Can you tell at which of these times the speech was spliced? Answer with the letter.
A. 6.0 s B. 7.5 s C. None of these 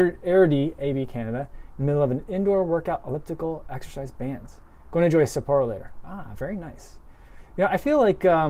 C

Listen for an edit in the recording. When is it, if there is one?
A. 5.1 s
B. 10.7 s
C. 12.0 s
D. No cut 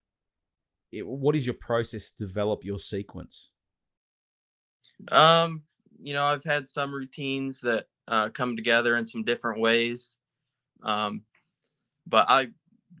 B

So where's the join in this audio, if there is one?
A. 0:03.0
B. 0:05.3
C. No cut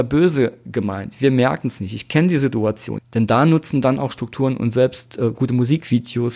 A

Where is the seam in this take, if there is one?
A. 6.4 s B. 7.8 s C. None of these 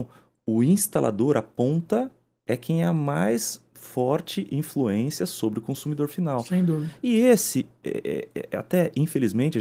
C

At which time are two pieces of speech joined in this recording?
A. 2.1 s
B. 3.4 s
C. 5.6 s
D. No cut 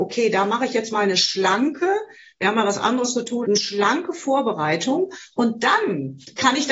B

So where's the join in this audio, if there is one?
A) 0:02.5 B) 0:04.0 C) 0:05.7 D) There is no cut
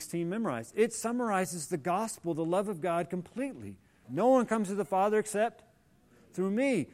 B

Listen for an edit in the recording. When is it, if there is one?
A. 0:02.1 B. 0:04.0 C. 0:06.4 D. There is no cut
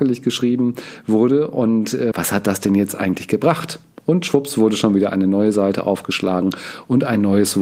A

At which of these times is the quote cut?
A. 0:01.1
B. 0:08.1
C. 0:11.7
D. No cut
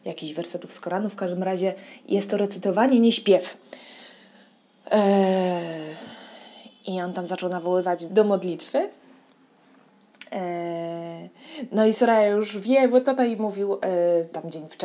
B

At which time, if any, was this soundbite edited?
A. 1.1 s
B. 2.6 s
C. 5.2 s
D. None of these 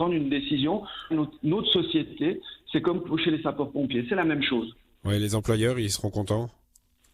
A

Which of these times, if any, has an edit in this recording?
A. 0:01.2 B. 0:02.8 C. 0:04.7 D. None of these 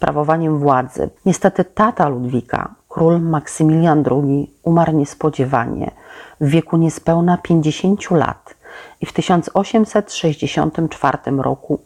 A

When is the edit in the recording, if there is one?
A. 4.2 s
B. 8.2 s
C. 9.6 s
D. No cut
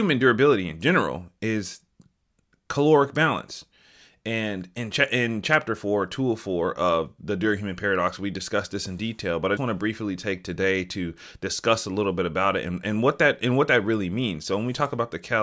C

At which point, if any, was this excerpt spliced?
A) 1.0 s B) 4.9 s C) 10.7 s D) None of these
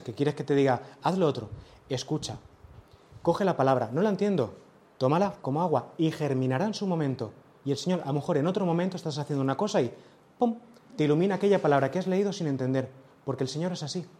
A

